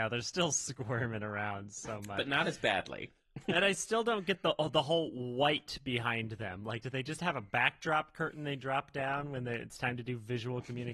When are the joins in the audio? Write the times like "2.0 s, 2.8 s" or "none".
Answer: none